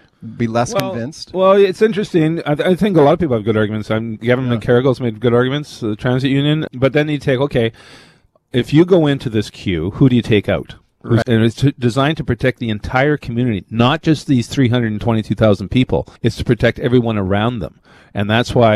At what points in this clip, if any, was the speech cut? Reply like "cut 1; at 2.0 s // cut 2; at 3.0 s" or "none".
cut 1; at 6.7 s // cut 2; at 11.2 s // cut 3; at 16.2 s